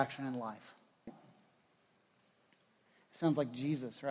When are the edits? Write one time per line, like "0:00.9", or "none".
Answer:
0:01.1